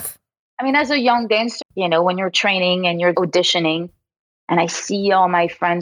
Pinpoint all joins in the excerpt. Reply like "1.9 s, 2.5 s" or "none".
1.6 s, 3.1 s